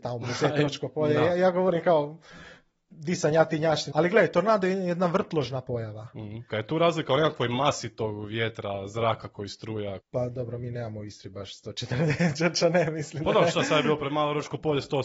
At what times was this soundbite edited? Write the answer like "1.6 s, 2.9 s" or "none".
3.9 s, 6.5 s, 10.0 s

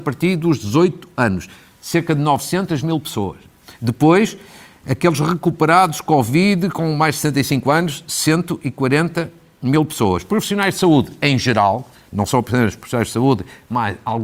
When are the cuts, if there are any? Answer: none

